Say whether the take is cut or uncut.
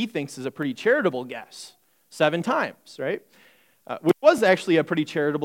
uncut